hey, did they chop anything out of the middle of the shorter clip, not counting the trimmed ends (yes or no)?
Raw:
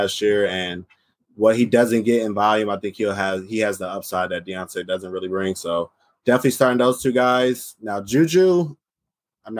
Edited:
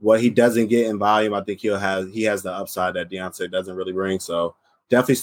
no